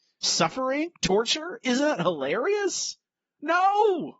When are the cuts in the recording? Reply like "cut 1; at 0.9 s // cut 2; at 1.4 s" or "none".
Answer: none